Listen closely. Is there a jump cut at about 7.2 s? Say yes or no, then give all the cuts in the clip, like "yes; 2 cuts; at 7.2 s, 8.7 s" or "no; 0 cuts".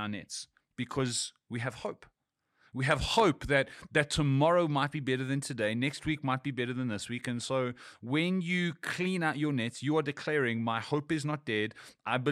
no; 0 cuts